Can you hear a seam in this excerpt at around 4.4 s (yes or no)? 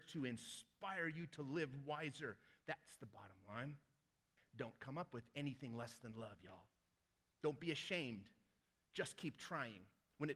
yes